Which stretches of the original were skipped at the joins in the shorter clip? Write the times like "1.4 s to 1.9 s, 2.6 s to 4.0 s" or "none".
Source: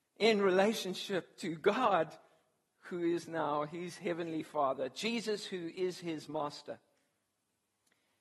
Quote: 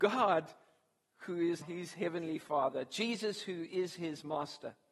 3.2 s to 3.7 s